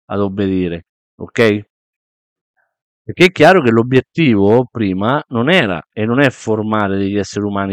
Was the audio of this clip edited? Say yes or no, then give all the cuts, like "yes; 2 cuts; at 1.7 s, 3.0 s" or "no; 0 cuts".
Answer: no; 0 cuts